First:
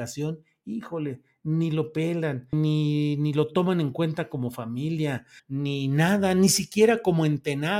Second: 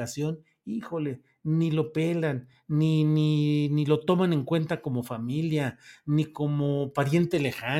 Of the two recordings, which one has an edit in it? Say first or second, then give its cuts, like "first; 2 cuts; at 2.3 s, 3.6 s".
first; 2 cuts; at 2.5 s, 5.4 s